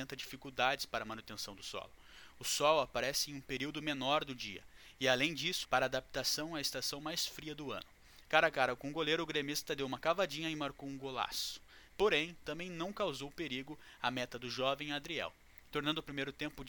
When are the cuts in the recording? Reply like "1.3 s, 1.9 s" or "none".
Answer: 5.6 s, 8.2 s, 11.9 s